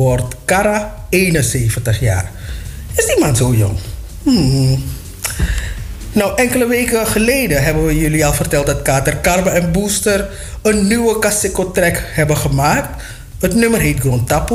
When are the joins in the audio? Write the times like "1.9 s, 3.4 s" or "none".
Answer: none